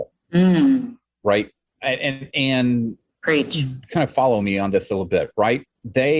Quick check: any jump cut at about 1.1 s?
no; 0 cuts

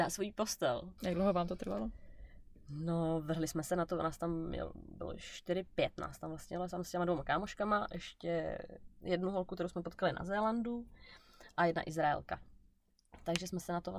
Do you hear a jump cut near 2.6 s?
no; 1 cut; at 1.0 s

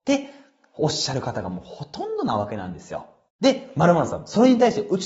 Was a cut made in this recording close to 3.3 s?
no; 0 cuts

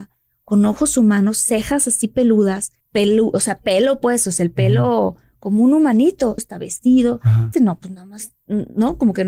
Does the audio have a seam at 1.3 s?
no; 3 cuts; at 2.8 s, 6.4 s, 7.5 s

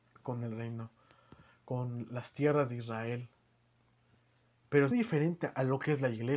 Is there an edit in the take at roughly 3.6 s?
no; 1 cut; at 4.9 s

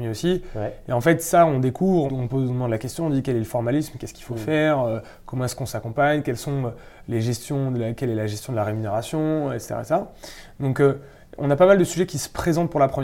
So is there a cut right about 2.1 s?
yes; 1 cut; at 2.1 s

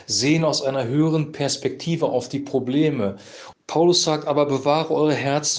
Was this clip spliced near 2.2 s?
no; 1 cut; at 3.5 s

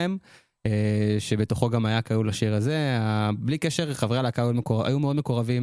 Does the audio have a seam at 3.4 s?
no; 0 cuts

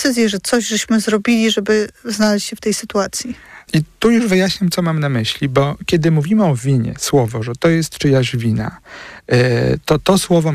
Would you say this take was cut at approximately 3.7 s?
yes; 1 cut; at 3.7 s

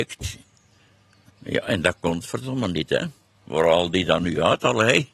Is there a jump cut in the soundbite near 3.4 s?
no; 1 cut; at 1.2 s

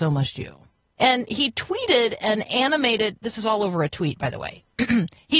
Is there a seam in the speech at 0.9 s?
yes; 1 cut; at 0.9 s

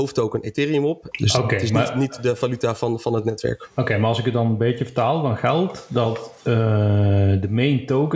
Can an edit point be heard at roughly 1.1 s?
yes; 1 cut; at 1.1 s

